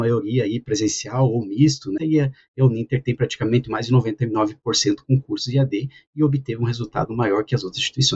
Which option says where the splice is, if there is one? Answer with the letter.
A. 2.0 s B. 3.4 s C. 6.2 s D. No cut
A